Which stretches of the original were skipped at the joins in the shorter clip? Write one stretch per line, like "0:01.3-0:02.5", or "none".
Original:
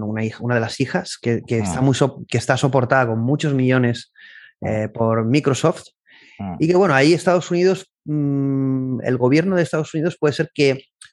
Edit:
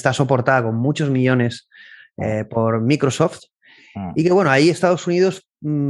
none